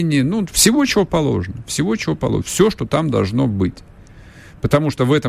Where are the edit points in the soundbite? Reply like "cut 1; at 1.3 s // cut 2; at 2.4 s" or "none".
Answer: none